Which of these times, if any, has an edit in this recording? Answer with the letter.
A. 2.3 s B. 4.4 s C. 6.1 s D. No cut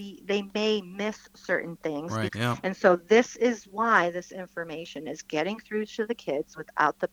A